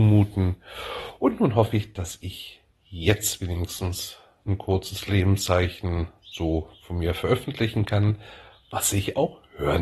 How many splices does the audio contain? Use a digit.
0